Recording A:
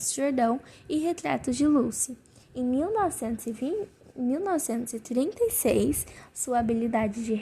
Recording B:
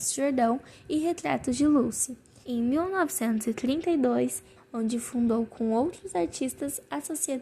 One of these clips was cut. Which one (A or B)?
B